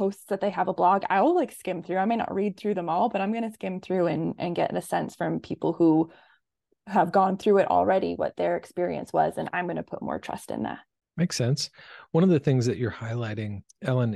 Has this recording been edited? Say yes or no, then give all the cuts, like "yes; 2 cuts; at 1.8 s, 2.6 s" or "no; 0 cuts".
no; 0 cuts